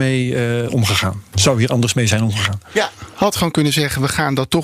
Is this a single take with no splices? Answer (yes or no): yes